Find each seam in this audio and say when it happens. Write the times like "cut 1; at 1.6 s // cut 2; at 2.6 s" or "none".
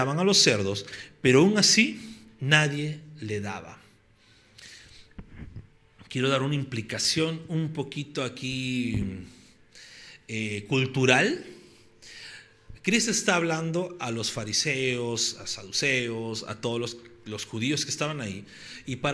none